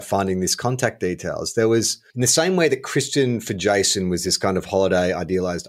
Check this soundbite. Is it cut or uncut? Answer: cut